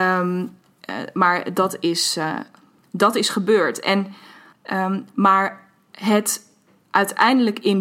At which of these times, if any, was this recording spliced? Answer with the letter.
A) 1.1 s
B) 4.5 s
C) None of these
B